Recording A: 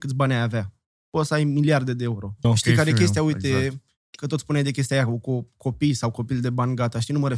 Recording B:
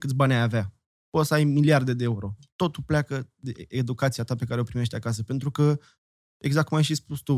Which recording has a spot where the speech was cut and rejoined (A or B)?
A